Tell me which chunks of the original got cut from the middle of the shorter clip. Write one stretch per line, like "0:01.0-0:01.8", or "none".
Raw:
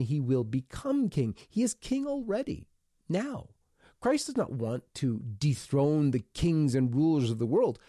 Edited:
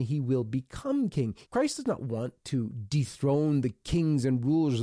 0:01.5-0:04.0